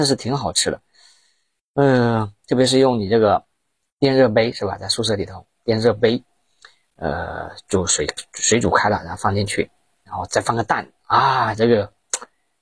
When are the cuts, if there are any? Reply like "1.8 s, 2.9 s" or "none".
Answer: 10.3 s